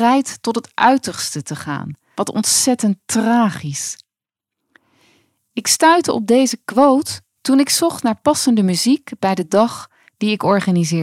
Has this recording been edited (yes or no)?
yes